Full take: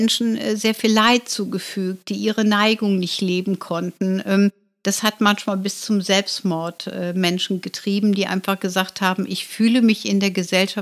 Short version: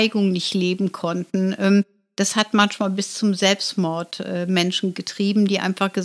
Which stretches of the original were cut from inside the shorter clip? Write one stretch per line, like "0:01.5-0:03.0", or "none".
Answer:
none

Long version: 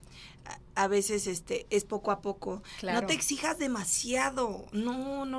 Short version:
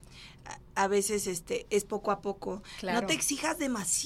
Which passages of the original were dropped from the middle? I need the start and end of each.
none

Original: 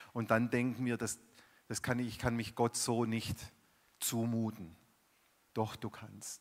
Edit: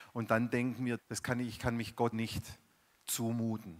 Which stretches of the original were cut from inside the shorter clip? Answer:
0:01.0-0:01.6
0:02.7-0:03.1

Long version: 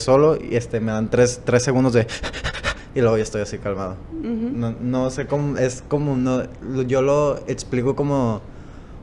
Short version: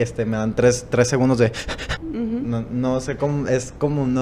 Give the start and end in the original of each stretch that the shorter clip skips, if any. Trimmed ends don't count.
0:02.5-0:04.1

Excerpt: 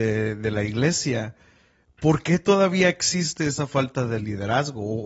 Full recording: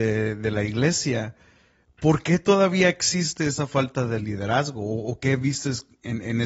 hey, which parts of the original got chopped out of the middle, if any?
none

